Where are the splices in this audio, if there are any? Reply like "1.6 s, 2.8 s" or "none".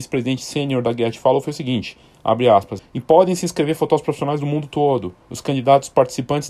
2.8 s